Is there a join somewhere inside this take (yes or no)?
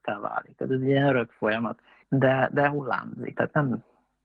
yes